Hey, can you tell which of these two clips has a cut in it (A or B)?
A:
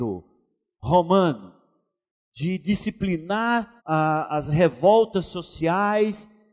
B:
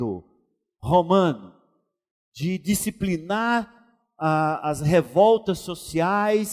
A